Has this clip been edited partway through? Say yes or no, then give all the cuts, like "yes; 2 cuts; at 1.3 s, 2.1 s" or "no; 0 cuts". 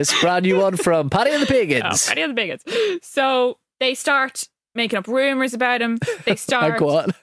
no; 0 cuts